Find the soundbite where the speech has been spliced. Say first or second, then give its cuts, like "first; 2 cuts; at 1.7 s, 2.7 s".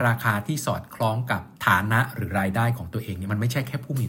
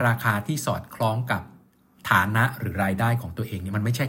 first; 1 cut; at 1.6 s